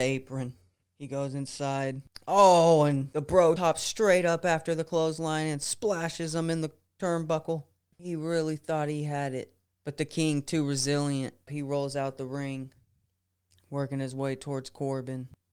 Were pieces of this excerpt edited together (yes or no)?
yes